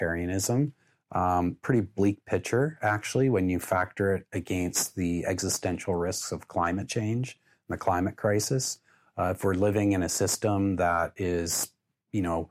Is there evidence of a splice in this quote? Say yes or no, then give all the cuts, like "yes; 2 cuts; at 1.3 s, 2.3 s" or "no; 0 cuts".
no; 0 cuts